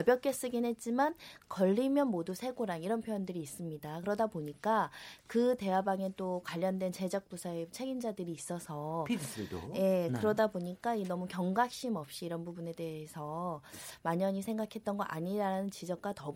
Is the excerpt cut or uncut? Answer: uncut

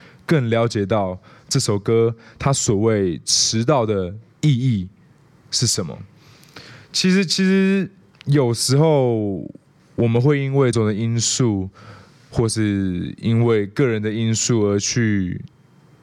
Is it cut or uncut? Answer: cut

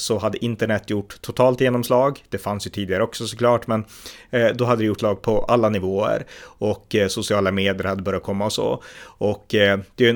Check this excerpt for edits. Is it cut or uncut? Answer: cut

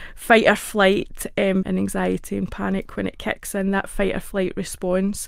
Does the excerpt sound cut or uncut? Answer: cut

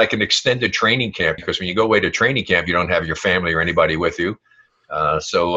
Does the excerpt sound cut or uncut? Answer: cut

